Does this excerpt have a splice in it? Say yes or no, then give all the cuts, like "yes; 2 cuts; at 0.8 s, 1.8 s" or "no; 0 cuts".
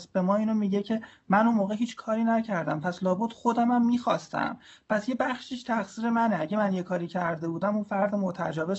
no; 0 cuts